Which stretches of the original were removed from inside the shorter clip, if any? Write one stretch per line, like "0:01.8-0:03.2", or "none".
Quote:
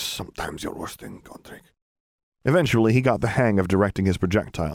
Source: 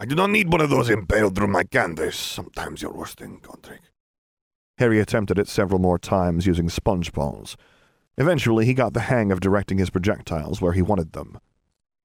0:04.5-0:08.1